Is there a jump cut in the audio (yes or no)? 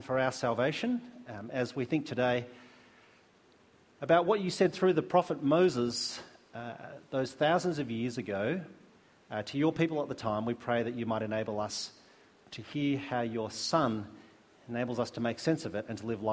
no